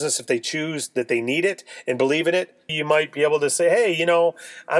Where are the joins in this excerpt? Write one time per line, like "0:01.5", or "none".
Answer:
0:02.7